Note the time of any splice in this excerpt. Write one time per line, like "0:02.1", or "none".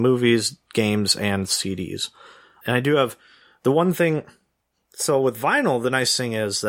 none